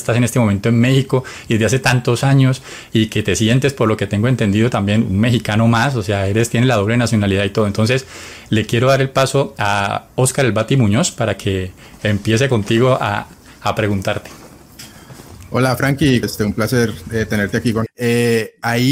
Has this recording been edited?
yes; 2 cuts; at 16.2 s, 17.9 s

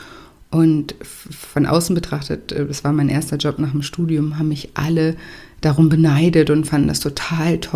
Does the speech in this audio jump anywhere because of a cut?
no; 0 cuts

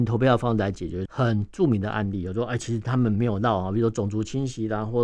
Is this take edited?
yes; 1 cut; at 1.1 s

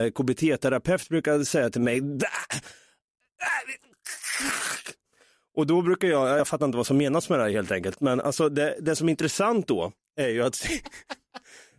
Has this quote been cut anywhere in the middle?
no; 0 cuts

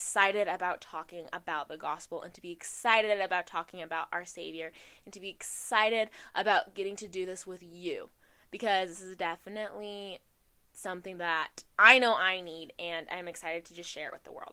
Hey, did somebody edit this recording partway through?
yes; 1 cut; at 11.7 s

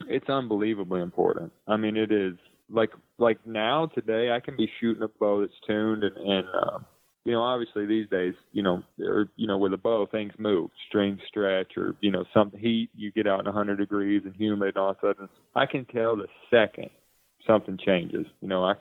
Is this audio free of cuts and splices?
yes; 0 cuts

